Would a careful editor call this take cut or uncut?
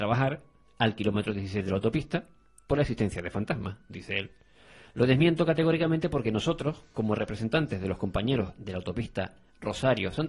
uncut